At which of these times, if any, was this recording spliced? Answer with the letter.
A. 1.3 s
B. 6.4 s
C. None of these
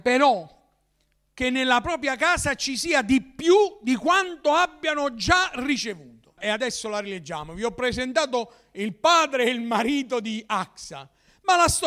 B